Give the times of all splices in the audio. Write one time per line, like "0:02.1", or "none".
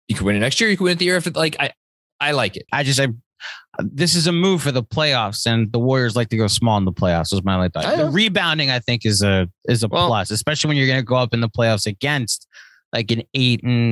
0:02.7